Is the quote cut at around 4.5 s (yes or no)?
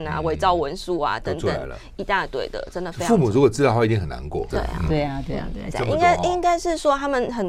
yes